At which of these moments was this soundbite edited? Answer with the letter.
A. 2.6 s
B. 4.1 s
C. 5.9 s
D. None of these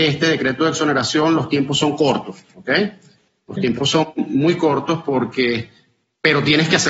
D